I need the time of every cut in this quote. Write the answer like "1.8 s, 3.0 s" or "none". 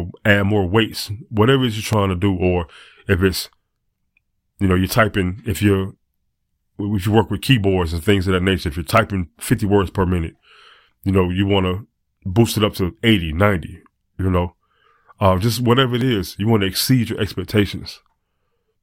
none